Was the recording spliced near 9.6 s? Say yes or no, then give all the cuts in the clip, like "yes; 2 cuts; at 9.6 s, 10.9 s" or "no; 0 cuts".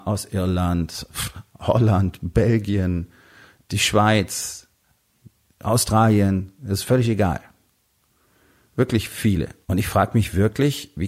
yes; 1 cut; at 9.6 s